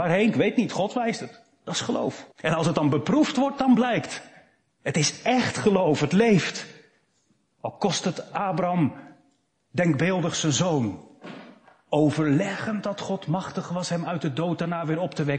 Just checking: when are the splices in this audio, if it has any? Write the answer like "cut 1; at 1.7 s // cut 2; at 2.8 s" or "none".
cut 1; at 2.3 s